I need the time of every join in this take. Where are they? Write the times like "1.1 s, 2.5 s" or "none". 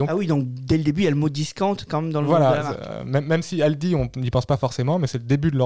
none